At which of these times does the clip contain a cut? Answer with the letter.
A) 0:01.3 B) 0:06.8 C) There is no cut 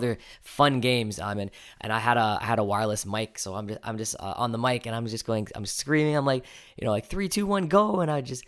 A